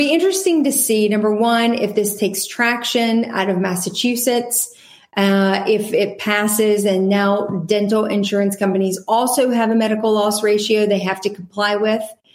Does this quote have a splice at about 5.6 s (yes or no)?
no